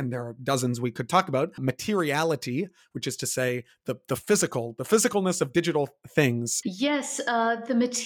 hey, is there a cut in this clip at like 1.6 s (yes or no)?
yes